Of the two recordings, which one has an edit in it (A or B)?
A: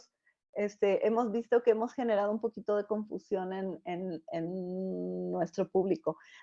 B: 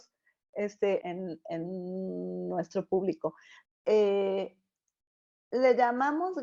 B